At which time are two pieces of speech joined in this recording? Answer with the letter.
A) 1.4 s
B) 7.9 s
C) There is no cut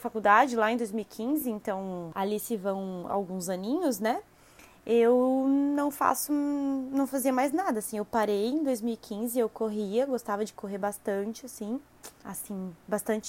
C